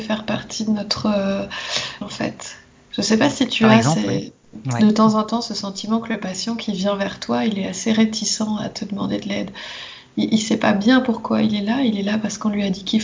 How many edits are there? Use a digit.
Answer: 1